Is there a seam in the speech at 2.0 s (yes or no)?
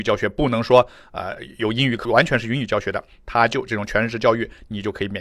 yes